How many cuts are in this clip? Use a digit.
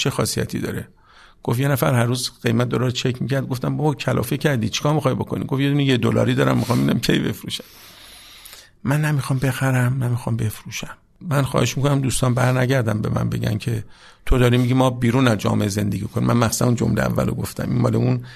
0